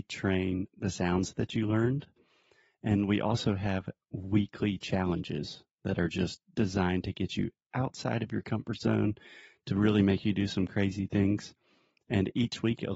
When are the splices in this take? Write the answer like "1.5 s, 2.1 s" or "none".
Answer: none